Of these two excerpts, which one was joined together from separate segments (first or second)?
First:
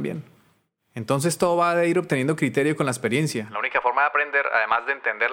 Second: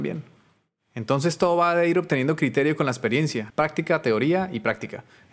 second